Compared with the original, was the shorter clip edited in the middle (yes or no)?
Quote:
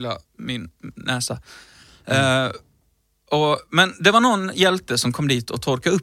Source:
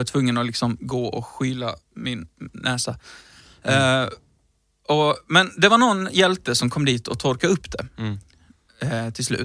no